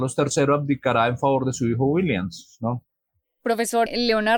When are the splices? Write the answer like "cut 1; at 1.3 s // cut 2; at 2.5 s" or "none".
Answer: none